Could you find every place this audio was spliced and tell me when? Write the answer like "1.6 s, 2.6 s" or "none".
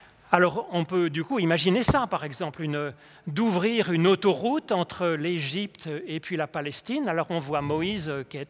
none